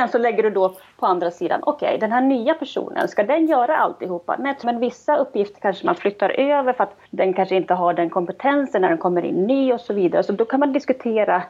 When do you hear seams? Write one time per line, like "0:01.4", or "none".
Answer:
0:04.6
0:07.1